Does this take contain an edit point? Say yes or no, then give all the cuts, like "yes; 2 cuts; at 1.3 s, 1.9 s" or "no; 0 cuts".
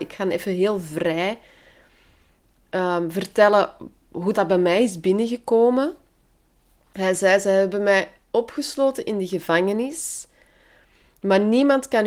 yes; 1 cut; at 4.3 s